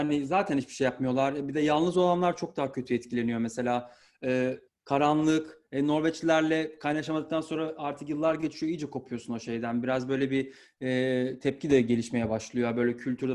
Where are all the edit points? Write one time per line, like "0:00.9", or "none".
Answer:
0:04.7